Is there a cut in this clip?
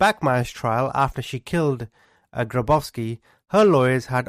no; 0 cuts

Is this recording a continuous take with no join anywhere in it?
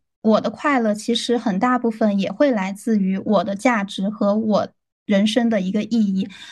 yes; 0 cuts

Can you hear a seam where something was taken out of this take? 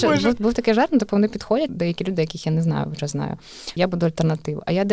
yes; 2 cuts; at 1.7 s, 3.8 s

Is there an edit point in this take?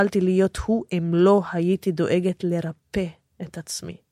no; 0 cuts

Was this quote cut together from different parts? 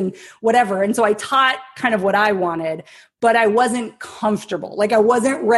no; 0 cuts

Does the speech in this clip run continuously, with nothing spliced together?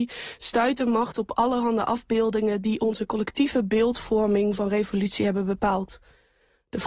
yes; 0 cuts

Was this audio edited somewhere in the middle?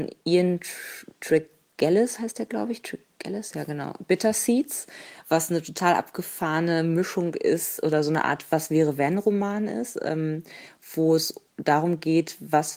no; 0 cuts

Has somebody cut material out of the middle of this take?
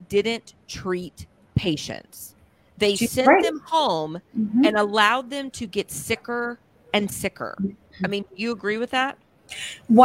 no; 0 cuts

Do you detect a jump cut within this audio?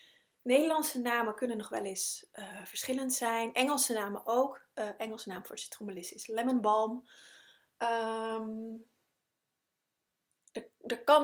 no; 0 cuts

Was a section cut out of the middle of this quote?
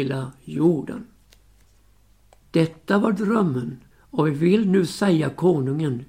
yes; 2 cuts; at 2.4 s, 3.9 s

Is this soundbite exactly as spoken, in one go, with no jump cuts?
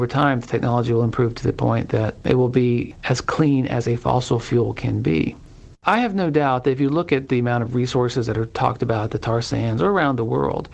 no; 1 cut; at 5.7 s

